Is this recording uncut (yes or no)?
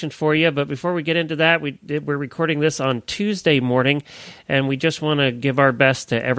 yes